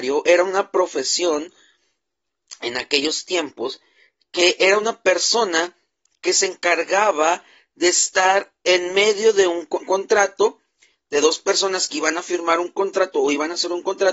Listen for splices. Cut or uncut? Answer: cut